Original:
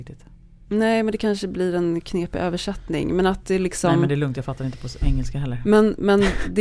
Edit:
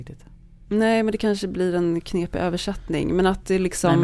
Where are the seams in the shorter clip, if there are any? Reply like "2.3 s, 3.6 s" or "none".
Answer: none